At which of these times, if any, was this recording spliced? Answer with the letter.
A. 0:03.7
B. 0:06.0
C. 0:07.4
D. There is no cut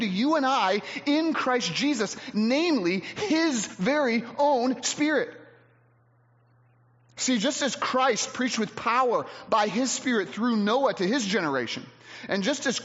D